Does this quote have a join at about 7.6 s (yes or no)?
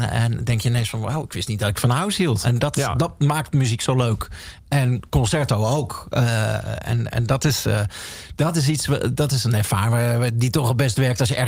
no